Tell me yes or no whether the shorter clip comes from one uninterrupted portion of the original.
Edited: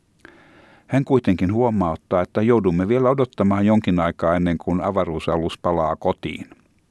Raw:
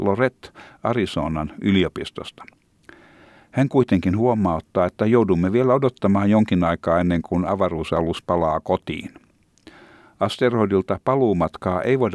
yes